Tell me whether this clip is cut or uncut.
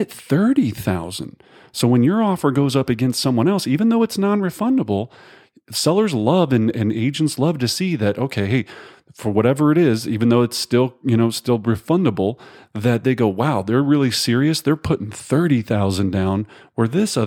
uncut